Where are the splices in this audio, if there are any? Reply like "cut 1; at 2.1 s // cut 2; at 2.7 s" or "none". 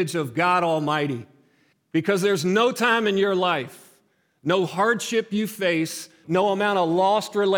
cut 1; at 1.7 s // cut 2; at 6.2 s